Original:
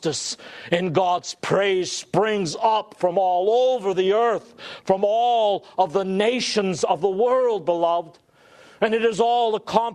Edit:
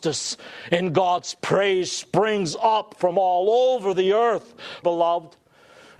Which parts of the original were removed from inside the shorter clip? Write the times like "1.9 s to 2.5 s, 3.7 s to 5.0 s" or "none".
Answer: 4.8 s to 7.7 s